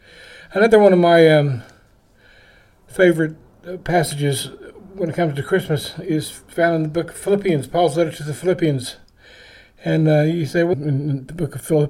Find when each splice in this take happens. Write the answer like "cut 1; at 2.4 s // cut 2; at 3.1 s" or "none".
cut 1; at 10.7 s